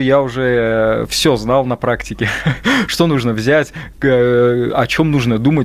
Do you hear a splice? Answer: no; 0 cuts

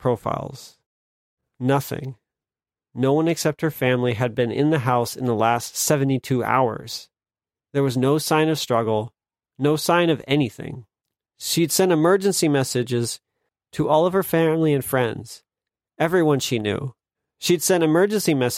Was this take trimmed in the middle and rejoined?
no; 0 cuts

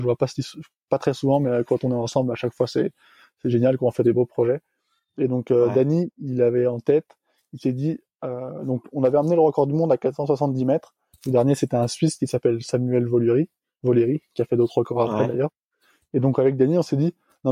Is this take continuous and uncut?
no; 1 cut; at 11.1 s

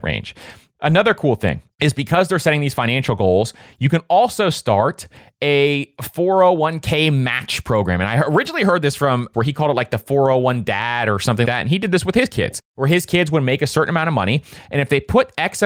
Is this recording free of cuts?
no; 2 cuts; at 9.3 s, 11.4 s

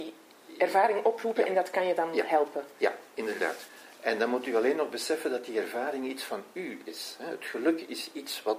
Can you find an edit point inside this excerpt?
no; 0 cuts

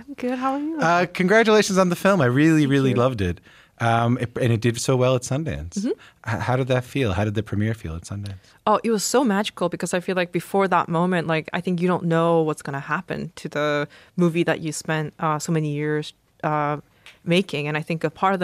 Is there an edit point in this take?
no; 0 cuts

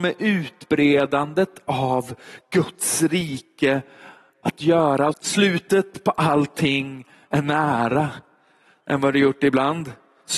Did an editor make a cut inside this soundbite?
yes; 2 cuts; at 5.1 s, 8.8 s

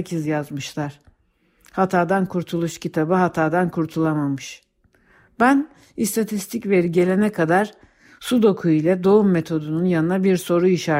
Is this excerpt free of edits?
yes; 0 cuts

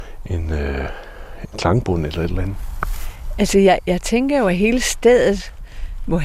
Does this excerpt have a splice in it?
no; 0 cuts

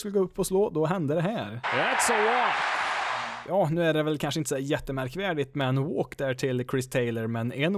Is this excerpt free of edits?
no; 1 cut; at 1.6 s

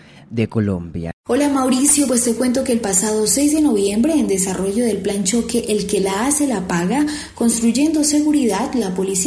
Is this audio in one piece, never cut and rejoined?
yes; 0 cuts

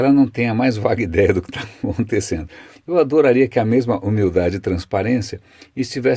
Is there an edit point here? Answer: yes; 1 cut; at 2.7 s

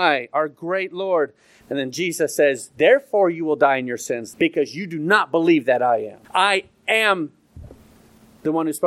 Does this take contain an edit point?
yes; 3 cuts; at 1.6 s, 4.3 s, 6.2 s

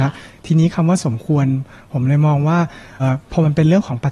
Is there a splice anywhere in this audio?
yes; 1 cut; at 3.0 s

